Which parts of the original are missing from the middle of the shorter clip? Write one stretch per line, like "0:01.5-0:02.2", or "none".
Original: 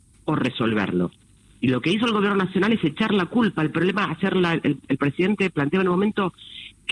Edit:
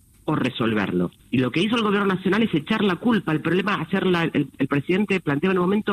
0:01.2-0:01.5